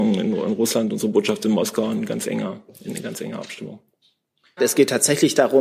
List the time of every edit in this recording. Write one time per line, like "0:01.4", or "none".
0:04.6